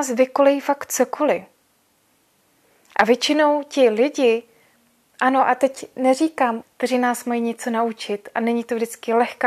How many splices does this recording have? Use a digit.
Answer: 1